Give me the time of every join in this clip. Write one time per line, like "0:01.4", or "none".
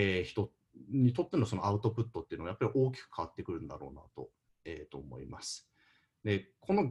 none